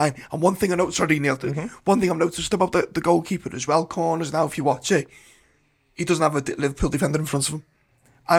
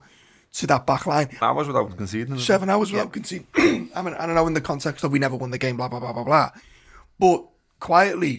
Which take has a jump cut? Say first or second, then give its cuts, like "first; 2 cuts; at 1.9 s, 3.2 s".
second; 1 cut; at 1.4 s